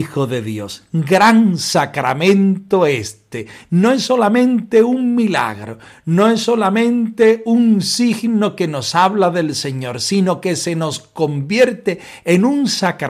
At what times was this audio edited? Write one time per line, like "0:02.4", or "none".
none